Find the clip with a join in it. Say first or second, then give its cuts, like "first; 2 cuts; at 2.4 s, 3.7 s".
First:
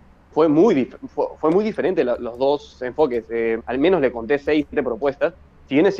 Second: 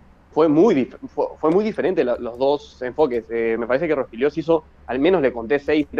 first; 1 cut; at 3.6 s